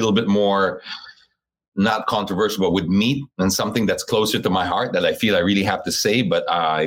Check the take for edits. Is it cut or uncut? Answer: uncut